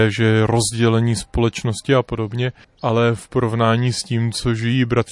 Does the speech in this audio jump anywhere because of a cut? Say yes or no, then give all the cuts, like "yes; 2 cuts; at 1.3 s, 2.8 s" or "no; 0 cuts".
yes; 1 cut; at 2.6 s